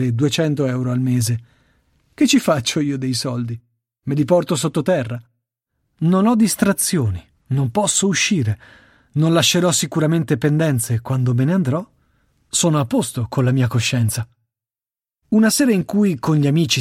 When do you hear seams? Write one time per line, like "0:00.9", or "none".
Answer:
none